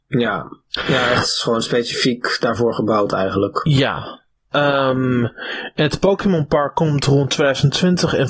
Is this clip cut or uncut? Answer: uncut